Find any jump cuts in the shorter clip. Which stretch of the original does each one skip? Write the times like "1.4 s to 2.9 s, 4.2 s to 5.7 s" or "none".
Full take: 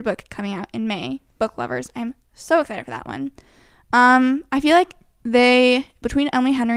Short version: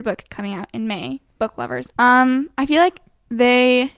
1.9 s to 3.9 s